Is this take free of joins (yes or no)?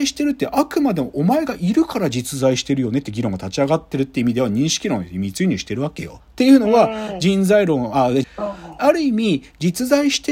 no